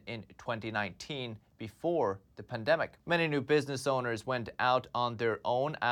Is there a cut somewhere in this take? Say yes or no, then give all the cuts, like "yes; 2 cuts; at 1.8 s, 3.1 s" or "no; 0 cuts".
yes; 1 cut; at 3.0 s